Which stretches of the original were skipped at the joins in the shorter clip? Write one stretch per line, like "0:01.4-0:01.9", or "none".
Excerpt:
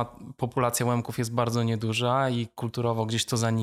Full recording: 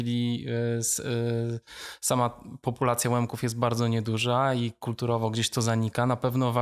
none